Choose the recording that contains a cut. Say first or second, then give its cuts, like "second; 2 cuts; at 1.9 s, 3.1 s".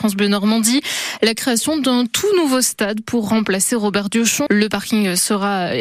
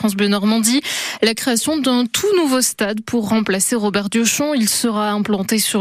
first; 1 cut; at 4.5 s